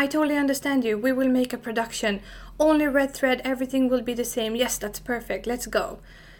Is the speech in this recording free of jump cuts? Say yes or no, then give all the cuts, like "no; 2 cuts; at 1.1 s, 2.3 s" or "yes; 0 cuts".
yes; 0 cuts